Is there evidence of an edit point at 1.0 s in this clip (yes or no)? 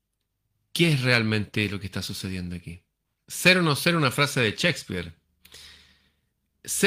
no